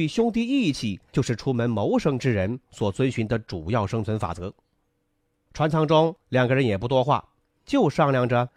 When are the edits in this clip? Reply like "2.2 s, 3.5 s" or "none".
5.5 s